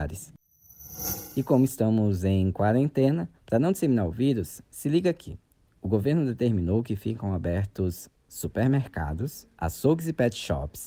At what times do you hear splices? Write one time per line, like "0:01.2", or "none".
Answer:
0:03.4
0:09.5